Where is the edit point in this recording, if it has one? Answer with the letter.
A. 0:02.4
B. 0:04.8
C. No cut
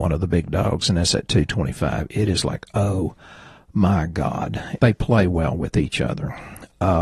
B